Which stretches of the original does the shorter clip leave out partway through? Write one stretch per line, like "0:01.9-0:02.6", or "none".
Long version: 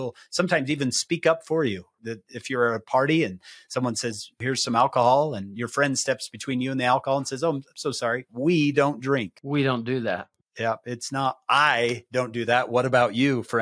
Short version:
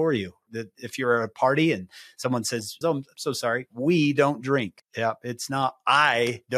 0:04.3-0:07.4
0:09.4-0:10.4